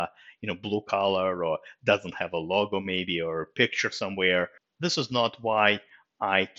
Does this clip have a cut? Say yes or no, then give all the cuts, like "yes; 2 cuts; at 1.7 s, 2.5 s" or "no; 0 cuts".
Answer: no; 0 cuts